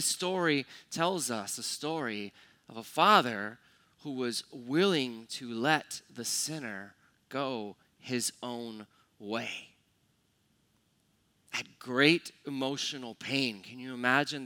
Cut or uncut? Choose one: uncut